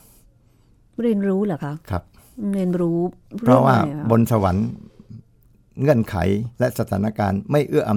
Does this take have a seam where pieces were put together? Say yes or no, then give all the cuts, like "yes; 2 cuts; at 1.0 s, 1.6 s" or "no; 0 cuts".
yes; 1 cut; at 6.5 s